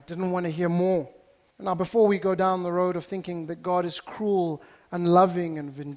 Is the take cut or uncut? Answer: cut